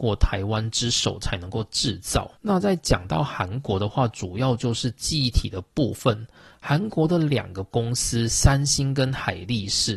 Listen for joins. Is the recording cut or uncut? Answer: uncut